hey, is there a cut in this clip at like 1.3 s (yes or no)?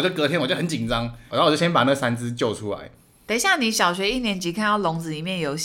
yes